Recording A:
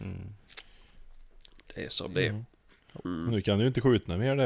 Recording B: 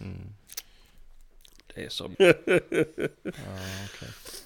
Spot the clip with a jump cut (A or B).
B